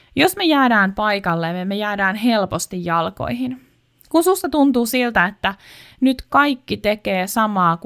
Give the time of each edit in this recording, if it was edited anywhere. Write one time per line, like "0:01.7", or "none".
none